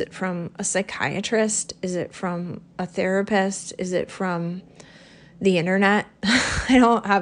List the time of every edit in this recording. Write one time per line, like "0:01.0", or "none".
none